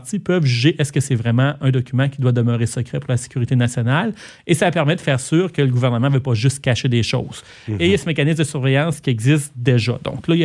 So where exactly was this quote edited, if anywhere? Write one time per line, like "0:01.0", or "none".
none